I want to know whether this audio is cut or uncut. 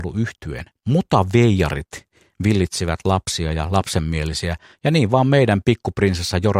uncut